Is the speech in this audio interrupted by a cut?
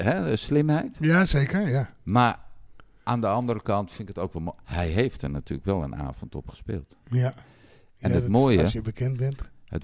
no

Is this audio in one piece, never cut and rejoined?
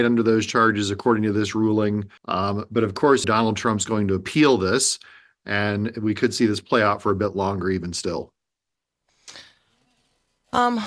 no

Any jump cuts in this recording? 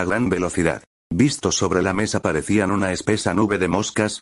no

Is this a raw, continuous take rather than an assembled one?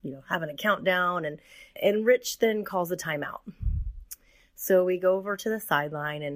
no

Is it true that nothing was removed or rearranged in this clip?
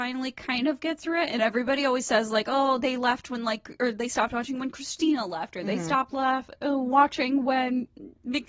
yes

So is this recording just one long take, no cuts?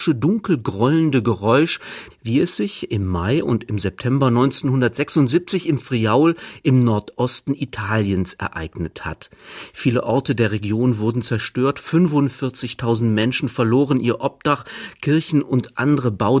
no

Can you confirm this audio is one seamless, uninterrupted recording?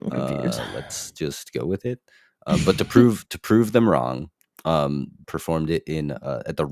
no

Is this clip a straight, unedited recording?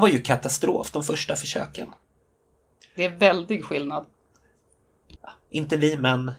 no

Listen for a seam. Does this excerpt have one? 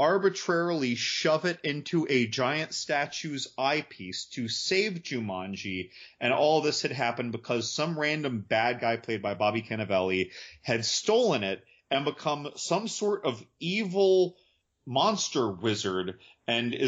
no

